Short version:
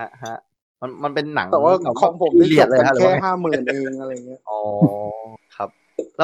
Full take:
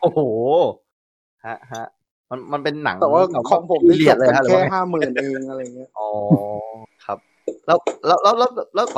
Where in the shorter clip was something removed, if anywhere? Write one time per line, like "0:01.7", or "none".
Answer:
none